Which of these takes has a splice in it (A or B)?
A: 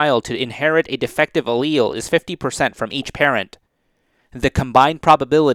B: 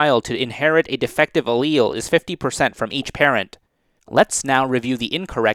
B